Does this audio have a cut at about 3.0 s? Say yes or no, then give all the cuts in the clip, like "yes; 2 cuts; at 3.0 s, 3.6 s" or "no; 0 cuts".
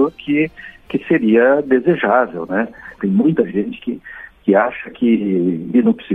yes; 1 cut; at 3.0 s